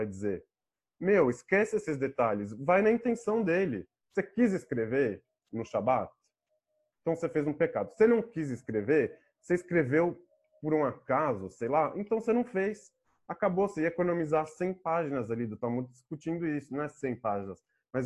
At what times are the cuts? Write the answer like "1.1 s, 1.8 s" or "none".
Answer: none